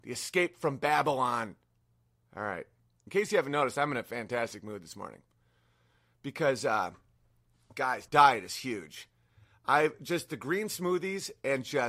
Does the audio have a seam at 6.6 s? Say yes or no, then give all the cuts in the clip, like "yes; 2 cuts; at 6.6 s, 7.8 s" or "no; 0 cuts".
no; 2 cuts; at 3.1 s, 8.1 s